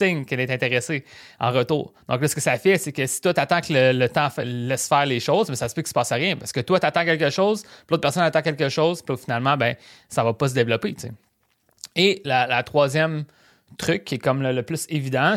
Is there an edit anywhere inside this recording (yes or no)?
no